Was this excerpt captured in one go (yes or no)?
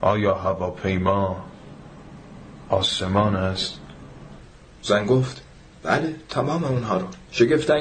no